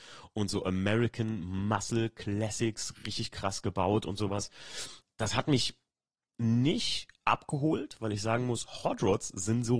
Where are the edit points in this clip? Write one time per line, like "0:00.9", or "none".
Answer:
0:05.0